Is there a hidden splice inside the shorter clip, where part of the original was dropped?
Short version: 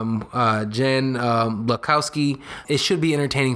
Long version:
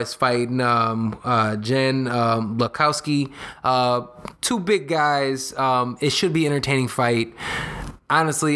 yes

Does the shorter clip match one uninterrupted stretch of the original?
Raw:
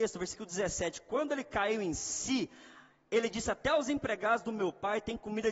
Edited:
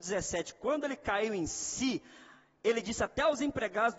yes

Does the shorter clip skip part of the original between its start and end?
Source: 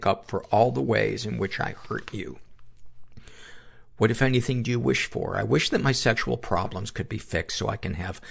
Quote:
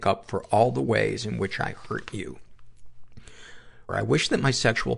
yes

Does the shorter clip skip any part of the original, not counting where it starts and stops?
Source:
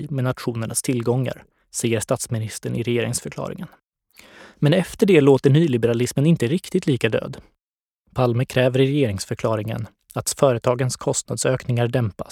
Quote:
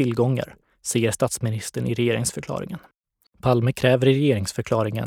yes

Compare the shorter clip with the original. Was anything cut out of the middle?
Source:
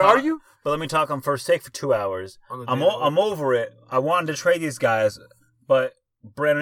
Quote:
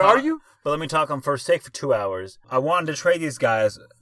yes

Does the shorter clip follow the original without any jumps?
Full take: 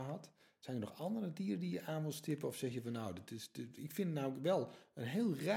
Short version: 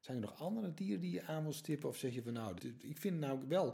no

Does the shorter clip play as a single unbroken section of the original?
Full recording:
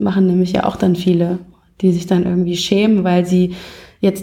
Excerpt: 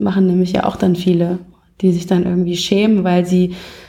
yes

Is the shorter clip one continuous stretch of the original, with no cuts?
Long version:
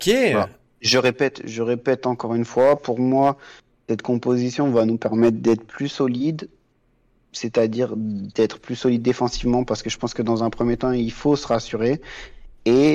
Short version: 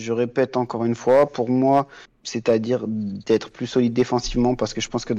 no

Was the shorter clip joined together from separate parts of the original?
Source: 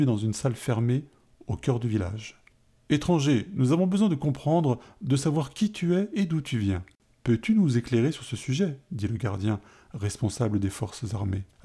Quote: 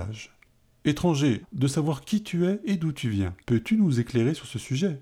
yes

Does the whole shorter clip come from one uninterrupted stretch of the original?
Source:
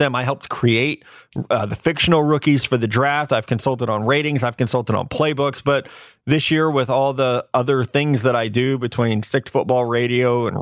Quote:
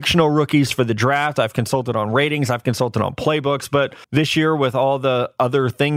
no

